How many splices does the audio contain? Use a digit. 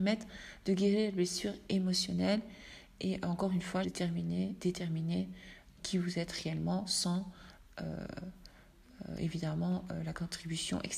2